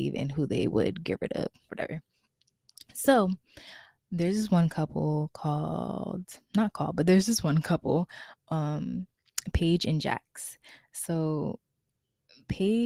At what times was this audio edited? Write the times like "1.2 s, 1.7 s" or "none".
1.7 s